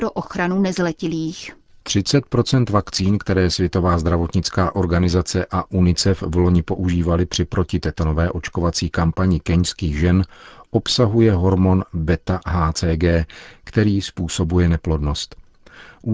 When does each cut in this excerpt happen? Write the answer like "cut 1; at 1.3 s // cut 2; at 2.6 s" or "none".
cut 1; at 1.8 s